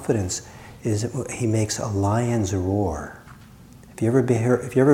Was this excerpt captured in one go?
yes; 0 cuts

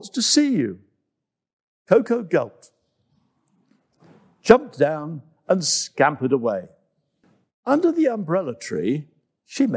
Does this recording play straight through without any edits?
yes; 0 cuts

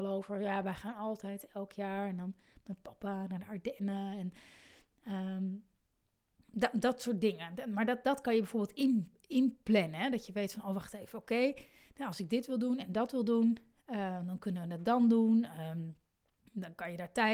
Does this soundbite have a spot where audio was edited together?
no; 0 cuts

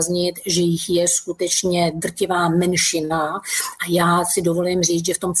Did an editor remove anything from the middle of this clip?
no; 0 cuts

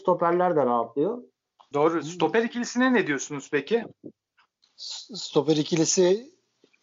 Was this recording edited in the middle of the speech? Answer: yes; 1 cut; at 1.7 s

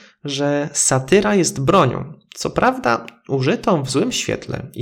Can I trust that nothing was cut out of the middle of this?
yes; 0 cuts

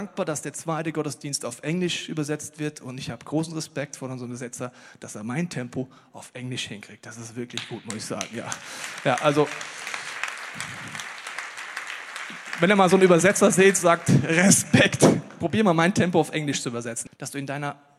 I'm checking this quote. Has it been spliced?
yes; 1 cut; at 17.1 s

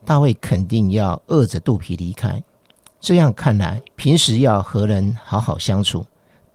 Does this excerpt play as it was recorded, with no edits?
no; 1 cut; at 3.9 s

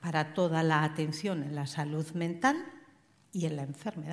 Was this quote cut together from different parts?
no; 0 cuts

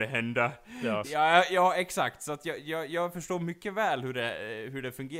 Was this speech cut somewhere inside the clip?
yes; 1 cut; at 1.0 s

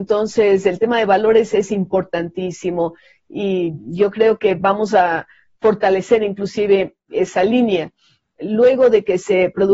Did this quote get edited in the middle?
no; 0 cuts

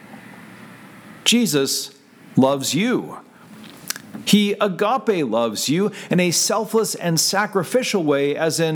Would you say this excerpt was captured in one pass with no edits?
yes; 0 cuts

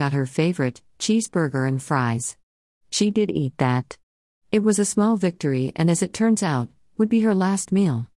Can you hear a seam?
no; 0 cuts

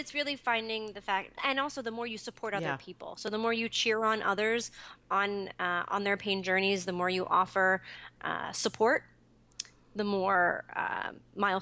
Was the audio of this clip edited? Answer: yes; 1 cut; at 1.4 s

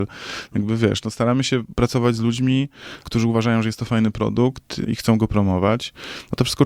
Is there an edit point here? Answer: yes; 2 cuts; at 3.0 s, 4.9 s

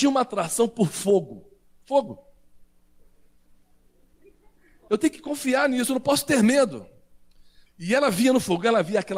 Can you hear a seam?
yes; 2 cuts; at 4.9 s, 7.7 s

